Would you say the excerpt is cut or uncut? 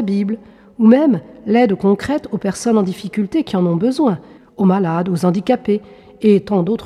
cut